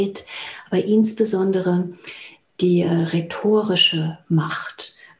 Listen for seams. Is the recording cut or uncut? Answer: uncut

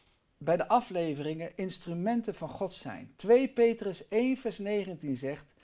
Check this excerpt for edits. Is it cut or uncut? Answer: uncut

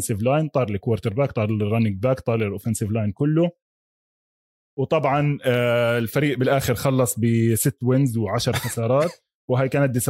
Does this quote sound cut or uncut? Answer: cut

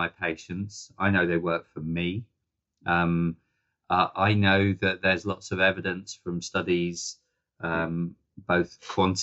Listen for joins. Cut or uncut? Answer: uncut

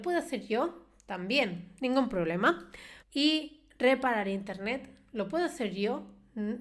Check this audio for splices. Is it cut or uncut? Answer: cut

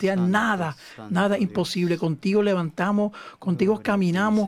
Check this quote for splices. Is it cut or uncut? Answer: uncut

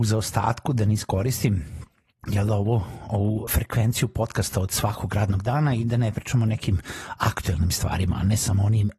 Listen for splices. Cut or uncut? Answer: cut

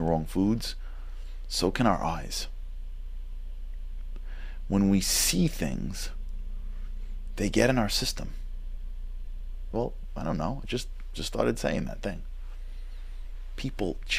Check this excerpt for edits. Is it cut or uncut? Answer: cut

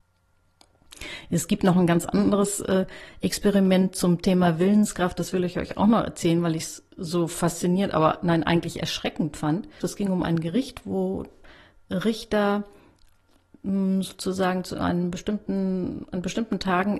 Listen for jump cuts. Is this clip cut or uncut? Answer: cut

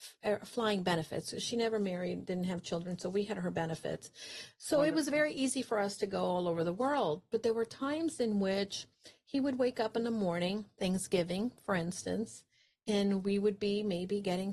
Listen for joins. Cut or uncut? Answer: uncut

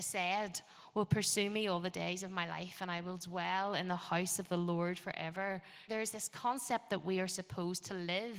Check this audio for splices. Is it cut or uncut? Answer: cut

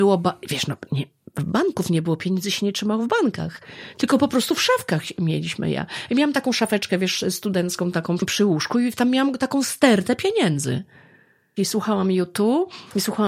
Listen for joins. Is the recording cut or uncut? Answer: cut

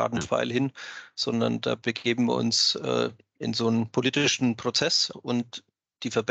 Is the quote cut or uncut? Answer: cut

